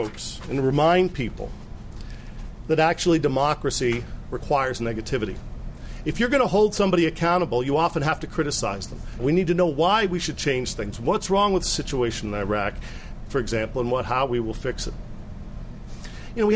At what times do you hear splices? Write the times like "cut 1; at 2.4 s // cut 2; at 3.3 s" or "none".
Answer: cut 1; at 9.2 s